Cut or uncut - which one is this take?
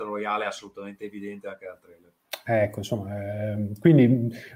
uncut